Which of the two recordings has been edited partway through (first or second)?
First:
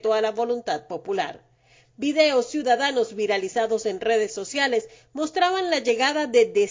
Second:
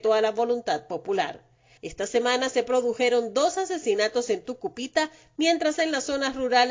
second